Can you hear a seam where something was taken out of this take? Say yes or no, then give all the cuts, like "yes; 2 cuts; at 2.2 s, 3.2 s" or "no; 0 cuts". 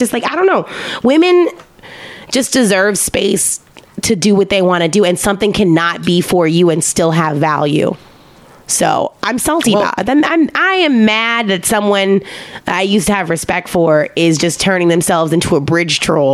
no; 0 cuts